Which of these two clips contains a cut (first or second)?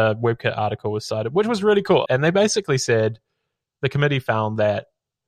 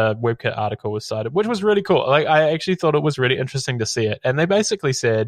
first